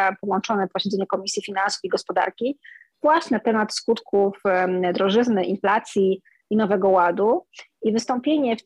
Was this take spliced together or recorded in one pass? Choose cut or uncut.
uncut